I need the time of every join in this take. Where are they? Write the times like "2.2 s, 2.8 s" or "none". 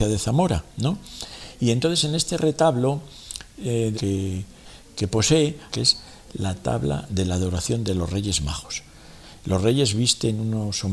3.9 s, 5.7 s